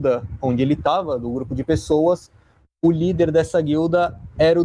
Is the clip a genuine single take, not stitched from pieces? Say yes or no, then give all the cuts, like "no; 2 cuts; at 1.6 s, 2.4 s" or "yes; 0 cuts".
yes; 0 cuts